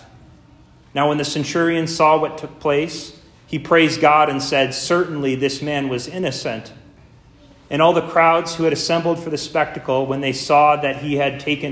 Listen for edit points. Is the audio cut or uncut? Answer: uncut